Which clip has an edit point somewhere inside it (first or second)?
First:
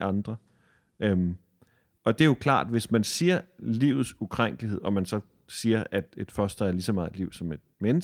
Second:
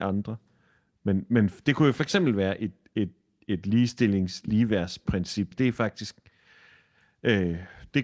second